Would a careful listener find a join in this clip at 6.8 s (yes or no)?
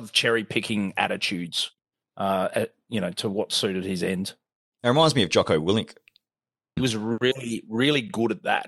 yes